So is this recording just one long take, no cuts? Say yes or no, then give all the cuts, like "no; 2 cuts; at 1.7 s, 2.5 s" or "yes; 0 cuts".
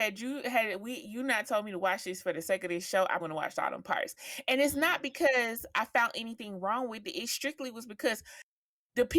no; 1 cut; at 3.2 s